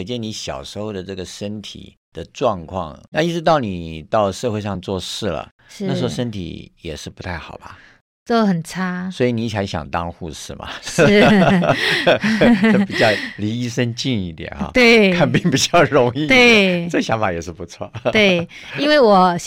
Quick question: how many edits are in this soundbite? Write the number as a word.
one